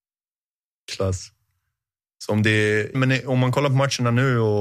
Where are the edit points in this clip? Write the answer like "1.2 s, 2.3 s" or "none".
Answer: 2.9 s